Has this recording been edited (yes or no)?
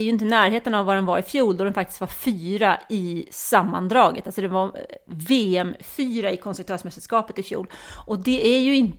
no